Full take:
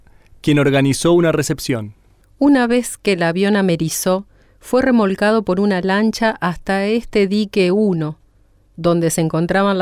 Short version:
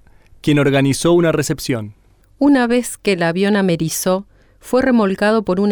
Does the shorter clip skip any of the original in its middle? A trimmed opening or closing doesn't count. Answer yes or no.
no